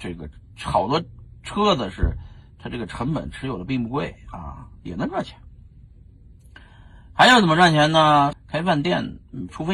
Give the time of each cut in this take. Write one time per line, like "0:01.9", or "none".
0:08.3